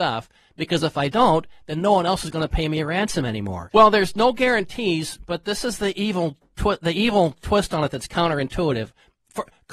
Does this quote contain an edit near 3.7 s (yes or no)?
yes